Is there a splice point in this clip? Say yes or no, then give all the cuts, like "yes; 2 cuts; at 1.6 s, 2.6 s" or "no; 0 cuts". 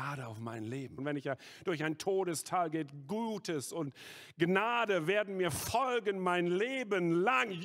yes; 1 cut; at 1.0 s